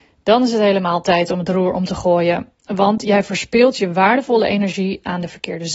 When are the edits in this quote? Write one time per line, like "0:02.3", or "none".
none